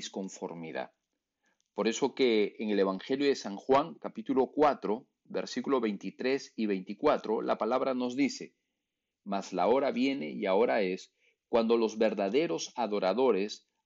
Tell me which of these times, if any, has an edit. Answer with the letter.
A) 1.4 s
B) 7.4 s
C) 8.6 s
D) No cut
D